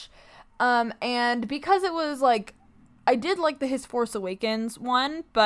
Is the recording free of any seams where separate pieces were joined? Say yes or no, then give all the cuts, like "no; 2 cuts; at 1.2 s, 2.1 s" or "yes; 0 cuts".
yes; 0 cuts